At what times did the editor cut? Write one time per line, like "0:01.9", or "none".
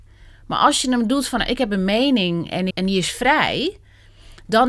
0:02.7